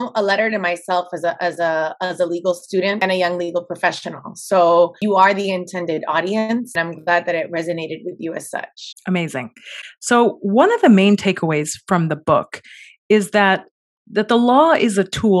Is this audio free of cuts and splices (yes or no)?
no